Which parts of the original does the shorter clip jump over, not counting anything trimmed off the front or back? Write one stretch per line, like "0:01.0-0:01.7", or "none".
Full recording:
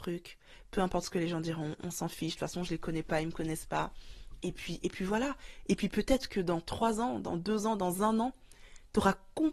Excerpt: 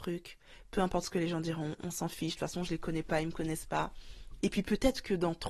0:04.4-0:05.7

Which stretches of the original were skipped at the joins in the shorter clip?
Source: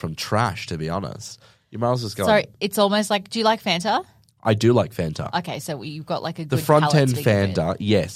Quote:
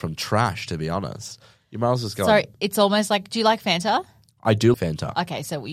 0:04.7-0:04.9

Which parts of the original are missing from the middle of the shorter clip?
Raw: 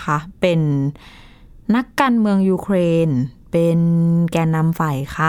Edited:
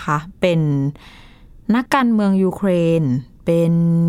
0:01.9-0:01.9

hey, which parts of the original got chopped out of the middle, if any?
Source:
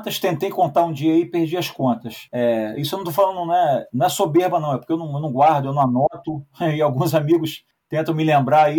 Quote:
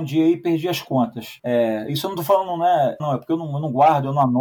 0:03.9-0:04.6

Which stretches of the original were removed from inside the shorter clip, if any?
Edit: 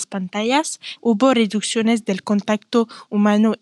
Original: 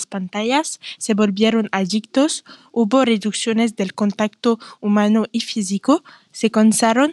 0:01.0-0:02.7

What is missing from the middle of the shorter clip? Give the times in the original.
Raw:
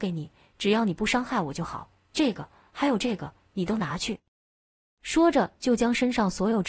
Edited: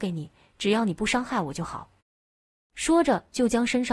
0:02.0-0:04.3

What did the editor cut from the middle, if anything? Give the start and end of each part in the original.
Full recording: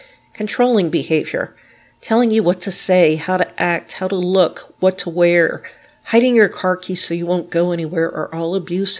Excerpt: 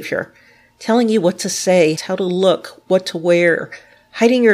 0:03.2-0:03.9

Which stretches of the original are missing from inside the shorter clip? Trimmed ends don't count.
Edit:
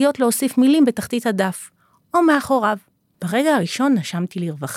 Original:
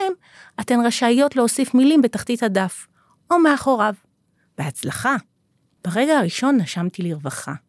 0:04.3-0:05.7

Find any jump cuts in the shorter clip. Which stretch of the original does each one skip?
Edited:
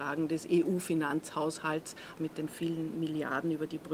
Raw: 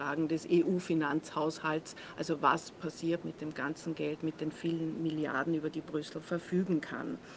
0:02.1-0:04.2

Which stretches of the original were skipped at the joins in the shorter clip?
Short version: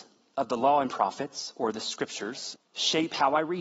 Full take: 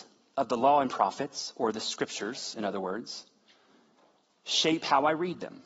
0:02.5-0:04.3

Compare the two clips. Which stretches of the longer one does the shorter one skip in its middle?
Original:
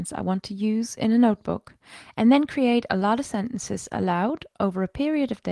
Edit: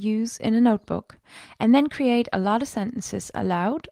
none

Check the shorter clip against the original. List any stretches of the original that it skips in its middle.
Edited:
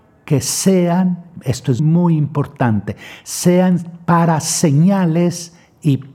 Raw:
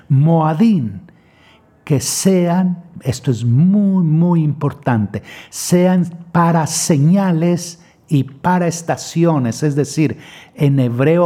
0:03.4-0:04.1

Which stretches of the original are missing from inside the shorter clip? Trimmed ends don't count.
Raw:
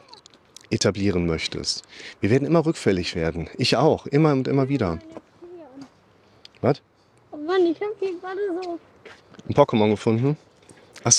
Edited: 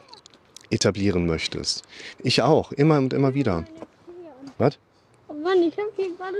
0:02.2-0:03.5
0:05.9-0:06.6

